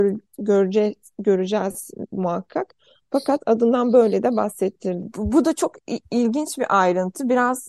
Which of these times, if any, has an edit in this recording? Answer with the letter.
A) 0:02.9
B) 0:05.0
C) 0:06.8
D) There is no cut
B